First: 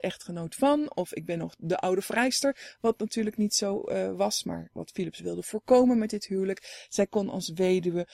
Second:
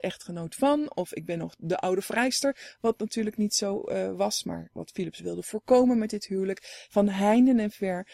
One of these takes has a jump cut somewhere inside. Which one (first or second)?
second